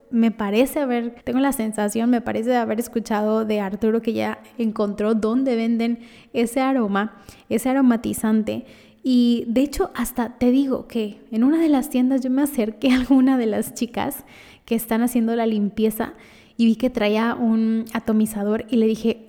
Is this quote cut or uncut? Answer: cut